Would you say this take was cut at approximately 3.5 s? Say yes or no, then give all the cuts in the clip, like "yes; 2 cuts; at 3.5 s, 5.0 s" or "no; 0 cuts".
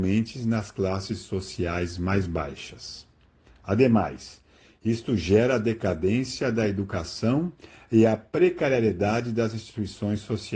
yes; 1 cut; at 3.5 s